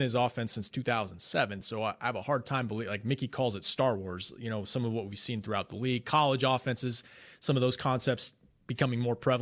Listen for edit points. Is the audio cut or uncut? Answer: uncut